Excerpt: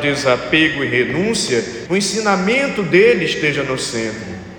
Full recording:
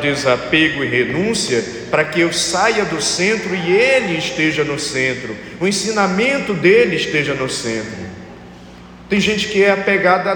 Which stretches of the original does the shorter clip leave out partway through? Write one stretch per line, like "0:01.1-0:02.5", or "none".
0:01.9-0:05.6